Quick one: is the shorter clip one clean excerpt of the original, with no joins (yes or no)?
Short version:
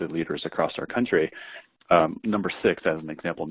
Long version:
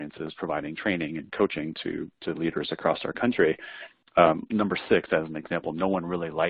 yes